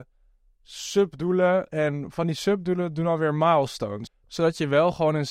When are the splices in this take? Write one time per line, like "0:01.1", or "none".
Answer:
0:04.1